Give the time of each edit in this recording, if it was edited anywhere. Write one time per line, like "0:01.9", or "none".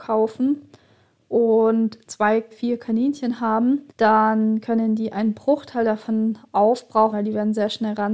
0:02.5
0:03.9
0:07.1